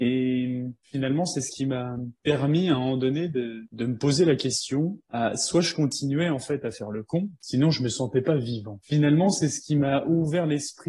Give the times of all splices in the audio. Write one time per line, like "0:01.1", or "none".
0:07.4
0:08.8

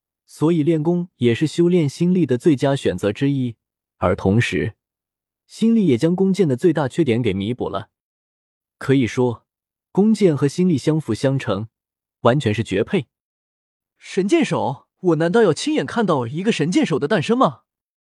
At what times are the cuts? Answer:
0:14.9

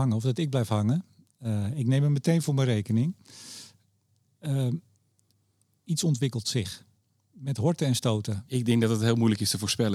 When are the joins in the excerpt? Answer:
0:08.5

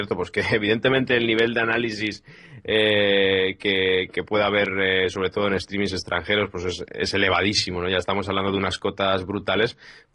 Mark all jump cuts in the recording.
none

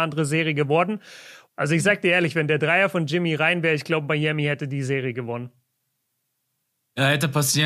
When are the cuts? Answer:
0:01.5

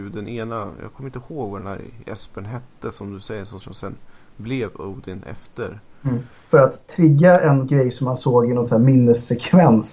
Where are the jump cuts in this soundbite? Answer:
0:03.6
0:06.4

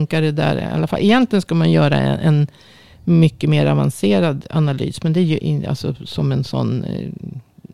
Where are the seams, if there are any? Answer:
0:05.4

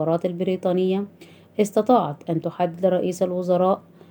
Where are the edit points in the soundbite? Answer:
none

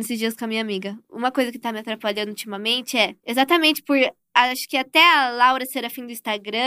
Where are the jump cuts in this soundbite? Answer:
0:03.2

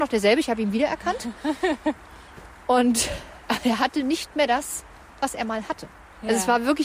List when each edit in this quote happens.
none

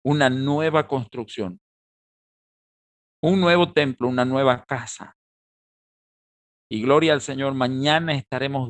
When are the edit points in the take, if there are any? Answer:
none

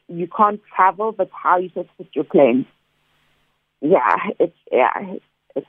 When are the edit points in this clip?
none

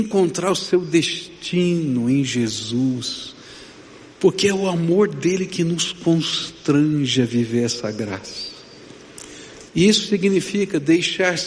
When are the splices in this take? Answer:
0:09.7

